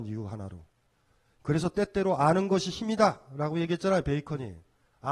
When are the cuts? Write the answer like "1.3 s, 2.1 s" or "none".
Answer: none